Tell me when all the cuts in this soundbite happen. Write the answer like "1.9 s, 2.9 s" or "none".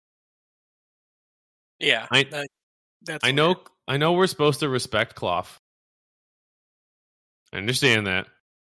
none

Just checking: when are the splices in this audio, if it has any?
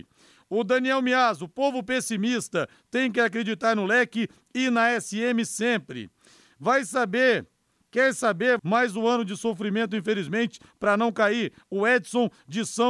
8.6 s

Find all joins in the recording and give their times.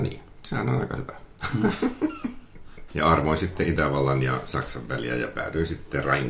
2.9 s

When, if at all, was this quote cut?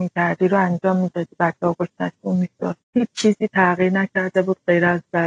2.8 s

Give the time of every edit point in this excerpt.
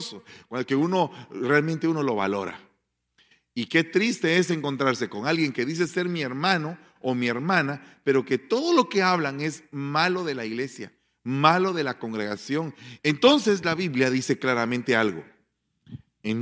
13.0 s

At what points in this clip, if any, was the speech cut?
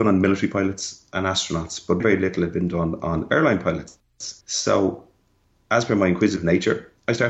2.0 s, 4.4 s

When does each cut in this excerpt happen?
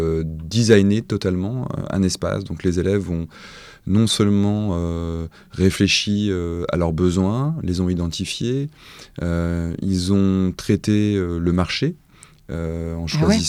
none

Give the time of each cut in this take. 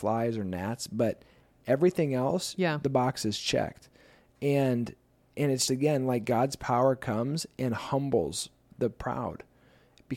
5.7 s, 8.7 s

